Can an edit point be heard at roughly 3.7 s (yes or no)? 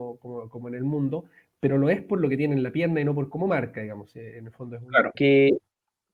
no